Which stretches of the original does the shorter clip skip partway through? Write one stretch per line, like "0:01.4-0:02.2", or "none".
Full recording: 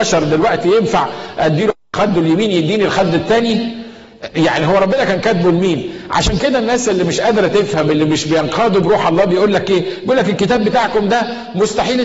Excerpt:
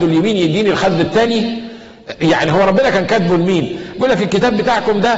0:06.1-0:10.0